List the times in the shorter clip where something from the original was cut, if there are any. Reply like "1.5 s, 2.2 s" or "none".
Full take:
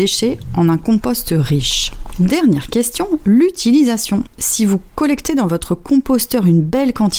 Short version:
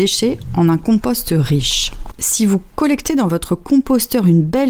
2.1 s

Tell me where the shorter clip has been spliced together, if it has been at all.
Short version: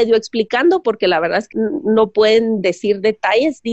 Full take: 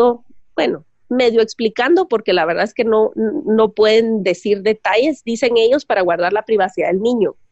1.5 s

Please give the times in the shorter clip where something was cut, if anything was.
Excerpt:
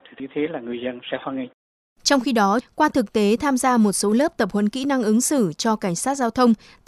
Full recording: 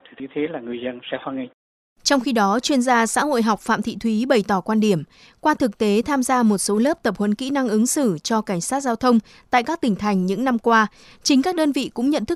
2.6 s

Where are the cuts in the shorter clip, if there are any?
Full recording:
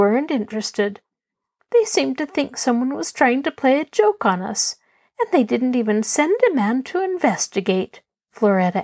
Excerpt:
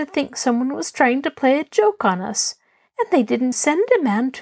3.5 s

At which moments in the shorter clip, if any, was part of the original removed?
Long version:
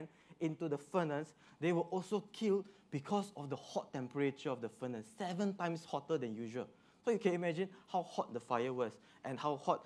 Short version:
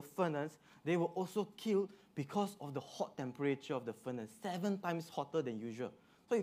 none

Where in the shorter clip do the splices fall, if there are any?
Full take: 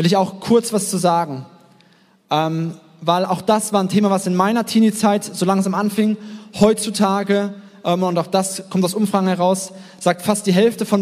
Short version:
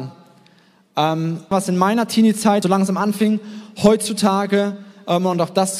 1.5 s, 2.6 s

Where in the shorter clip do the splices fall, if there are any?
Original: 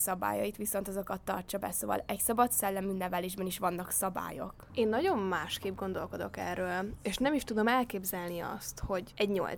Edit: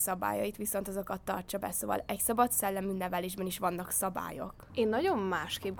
none

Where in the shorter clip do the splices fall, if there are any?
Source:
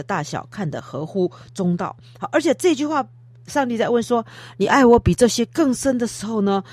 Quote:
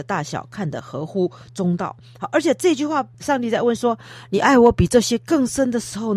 3.1 s

